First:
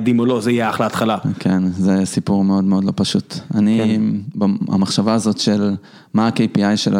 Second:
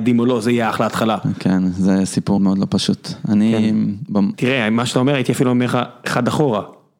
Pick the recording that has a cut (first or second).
second